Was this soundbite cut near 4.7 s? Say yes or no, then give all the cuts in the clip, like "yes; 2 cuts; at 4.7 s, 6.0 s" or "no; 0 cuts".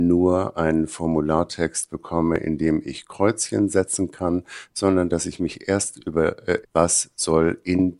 no; 1 cut; at 6.6 s